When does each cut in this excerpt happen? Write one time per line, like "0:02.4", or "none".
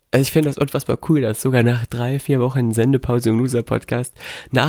none